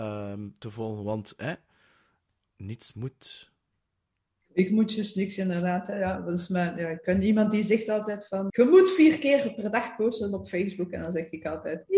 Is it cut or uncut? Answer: cut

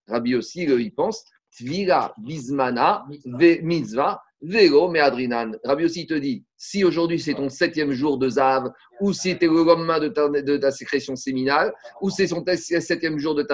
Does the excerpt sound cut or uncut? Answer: uncut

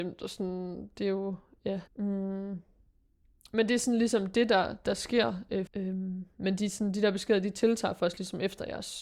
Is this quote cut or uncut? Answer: cut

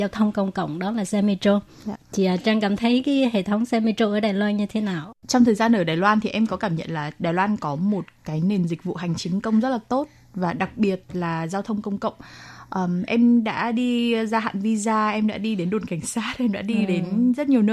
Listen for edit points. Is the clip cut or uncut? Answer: uncut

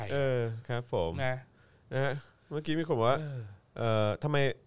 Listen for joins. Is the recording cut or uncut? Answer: uncut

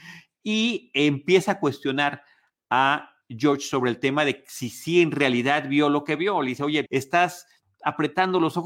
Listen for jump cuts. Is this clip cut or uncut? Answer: cut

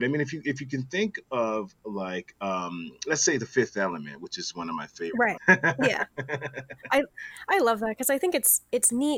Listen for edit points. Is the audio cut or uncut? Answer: cut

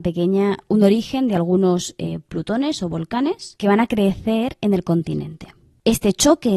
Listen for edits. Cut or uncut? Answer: uncut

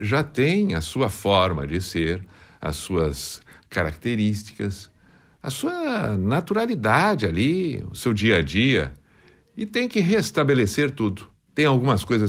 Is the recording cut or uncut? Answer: uncut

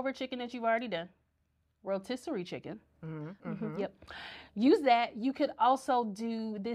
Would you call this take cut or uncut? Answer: cut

